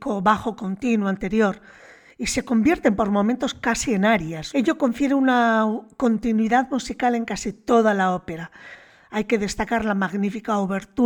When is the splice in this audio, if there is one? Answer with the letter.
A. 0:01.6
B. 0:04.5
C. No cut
B